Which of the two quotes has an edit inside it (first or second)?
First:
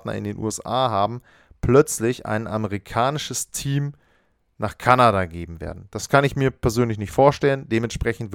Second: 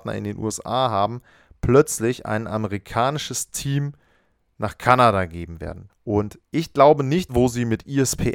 second